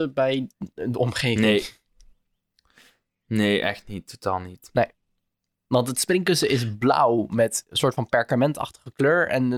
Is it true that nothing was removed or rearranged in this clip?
yes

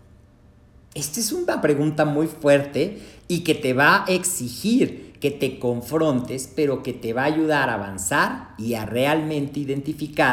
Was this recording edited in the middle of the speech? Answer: no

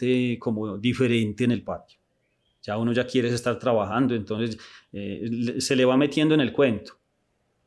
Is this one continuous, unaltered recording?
yes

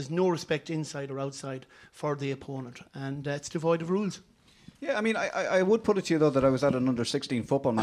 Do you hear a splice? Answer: no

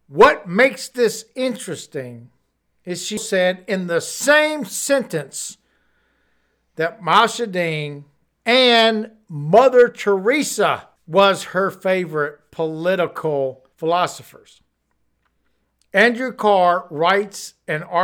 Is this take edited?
yes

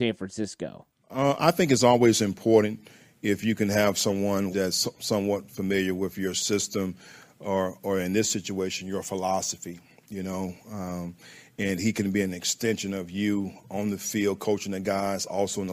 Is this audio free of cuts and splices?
no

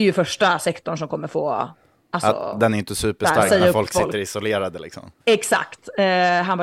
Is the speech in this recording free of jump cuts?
no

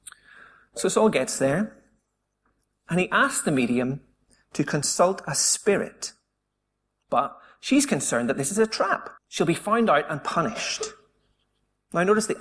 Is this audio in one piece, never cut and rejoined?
no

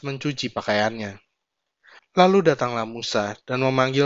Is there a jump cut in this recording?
yes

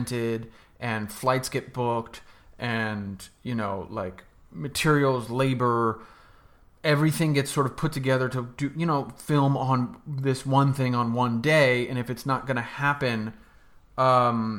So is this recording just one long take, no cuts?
yes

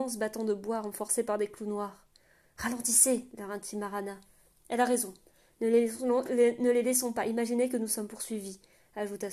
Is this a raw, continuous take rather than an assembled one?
yes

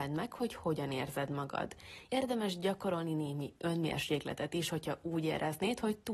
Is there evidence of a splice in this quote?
yes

